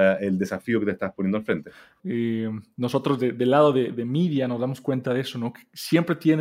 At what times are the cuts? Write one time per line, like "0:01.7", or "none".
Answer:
0:02.0